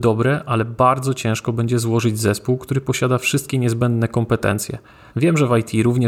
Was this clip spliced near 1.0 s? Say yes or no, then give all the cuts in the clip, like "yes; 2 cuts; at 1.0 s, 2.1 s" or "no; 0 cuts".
no; 1 cut; at 5.1 s